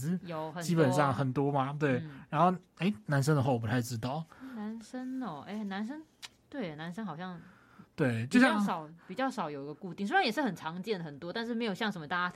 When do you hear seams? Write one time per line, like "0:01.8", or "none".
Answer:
none